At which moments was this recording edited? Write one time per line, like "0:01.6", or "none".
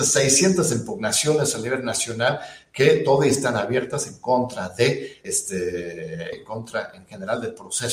0:05.2
0:06.3

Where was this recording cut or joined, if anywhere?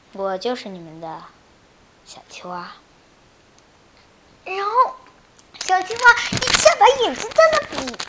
none

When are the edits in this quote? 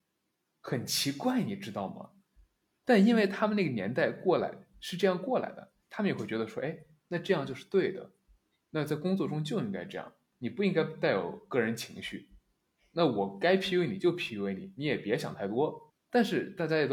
0:15.9

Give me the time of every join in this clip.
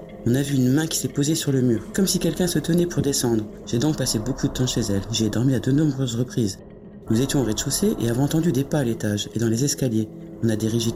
0:03.6
0:07.1

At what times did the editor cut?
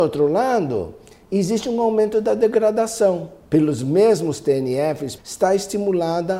0:03.4
0:05.2

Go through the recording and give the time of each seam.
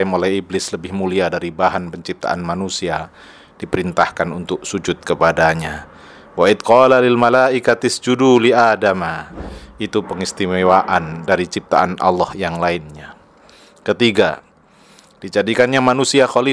none

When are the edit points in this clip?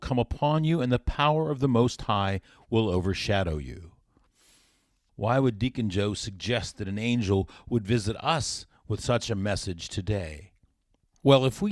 0:05.1

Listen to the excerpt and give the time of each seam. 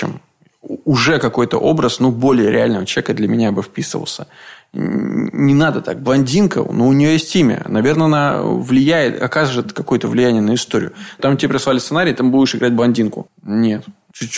0:11.2
0:13.3

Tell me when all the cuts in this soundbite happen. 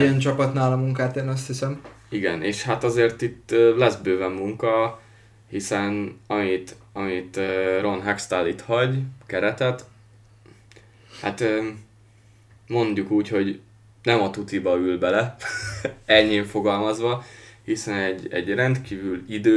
none

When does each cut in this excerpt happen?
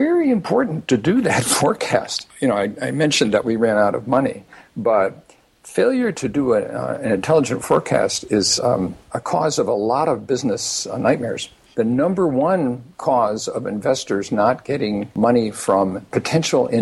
none

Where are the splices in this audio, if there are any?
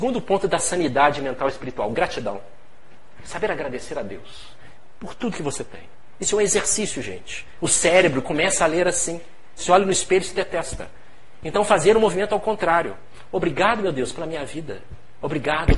0:07.6
0:09.6

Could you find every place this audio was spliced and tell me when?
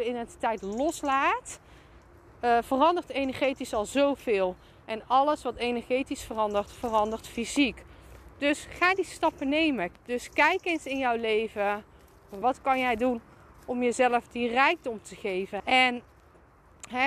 0:09.9
0:12.4
0:15.6

